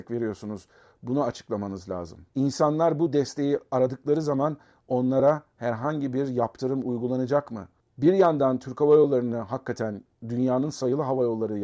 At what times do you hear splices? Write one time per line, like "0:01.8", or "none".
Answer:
0:02.3
0:07.9